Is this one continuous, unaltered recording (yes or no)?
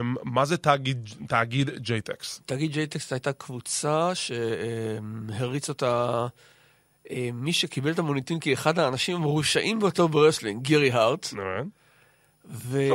yes